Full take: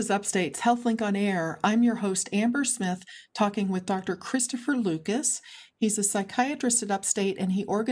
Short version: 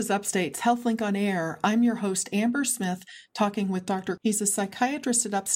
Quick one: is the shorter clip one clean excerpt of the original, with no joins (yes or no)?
no